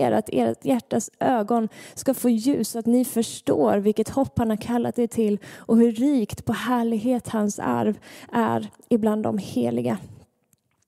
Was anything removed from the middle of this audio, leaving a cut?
no; 0 cuts

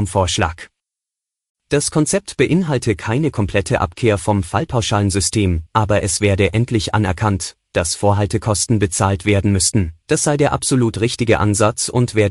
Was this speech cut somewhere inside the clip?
yes; 2 cuts; at 5.7 s, 10.0 s

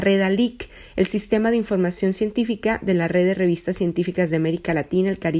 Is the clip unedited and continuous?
yes; 0 cuts

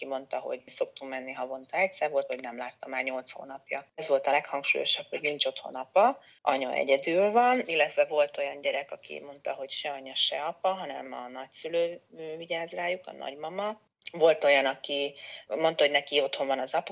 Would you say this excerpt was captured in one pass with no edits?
no; 1 cut; at 2.3 s

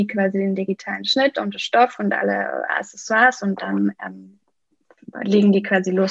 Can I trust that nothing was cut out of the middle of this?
yes; 0 cuts

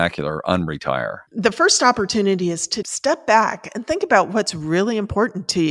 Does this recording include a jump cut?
yes; 2 cuts; at 1.3 s, 2.8 s

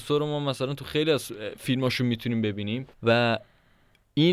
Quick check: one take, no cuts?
no; 1 cut; at 2.9 s

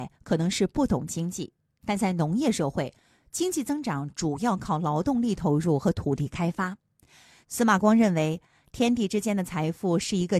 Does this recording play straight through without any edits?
no; 1 cut; at 7.4 s

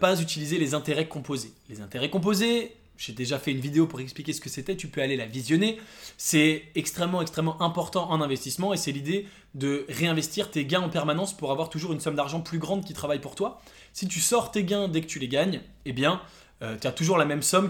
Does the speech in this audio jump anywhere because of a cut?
no; 0 cuts

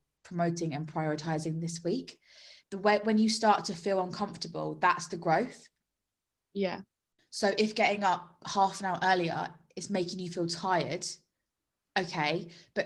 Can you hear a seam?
yes; 1 cut; at 2.6 s

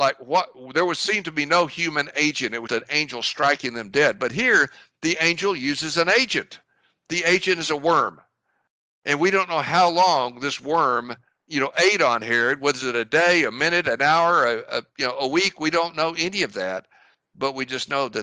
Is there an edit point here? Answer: yes; 1 cut; at 2.7 s

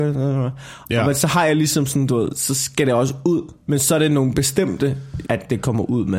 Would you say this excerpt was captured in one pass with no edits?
no; 2 cuts; at 3.6 s, 5.2 s

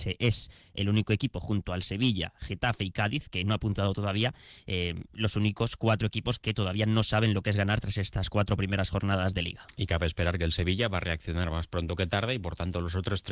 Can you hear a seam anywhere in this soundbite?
no; 0 cuts

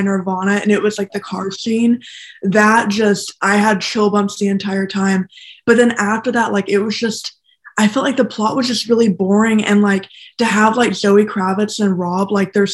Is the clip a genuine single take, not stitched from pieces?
yes; 0 cuts

